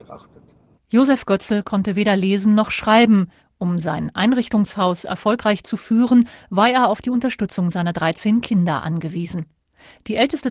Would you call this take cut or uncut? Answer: uncut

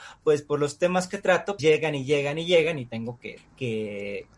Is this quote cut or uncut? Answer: cut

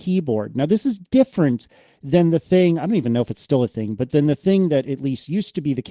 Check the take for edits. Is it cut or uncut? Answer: uncut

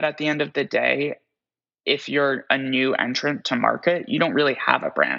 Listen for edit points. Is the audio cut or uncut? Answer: uncut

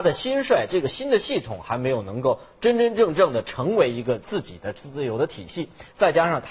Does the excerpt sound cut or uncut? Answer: uncut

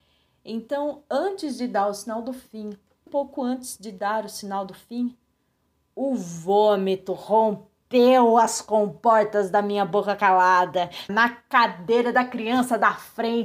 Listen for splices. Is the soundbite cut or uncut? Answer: cut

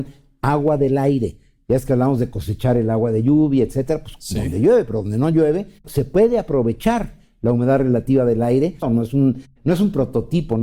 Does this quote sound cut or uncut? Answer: cut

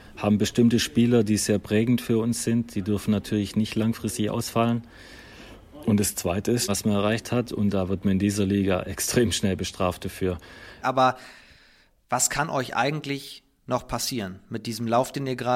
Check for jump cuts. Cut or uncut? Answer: cut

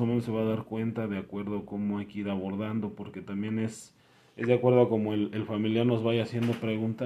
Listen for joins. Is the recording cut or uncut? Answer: uncut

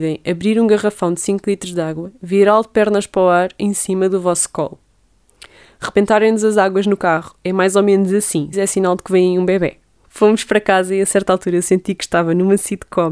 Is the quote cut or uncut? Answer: cut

